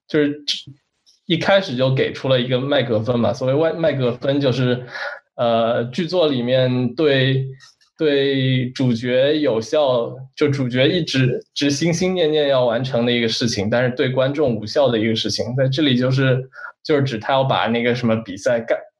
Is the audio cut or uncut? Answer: uncut